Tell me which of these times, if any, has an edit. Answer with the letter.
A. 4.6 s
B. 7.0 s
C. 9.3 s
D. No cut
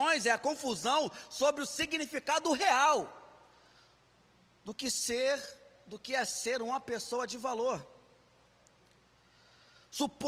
D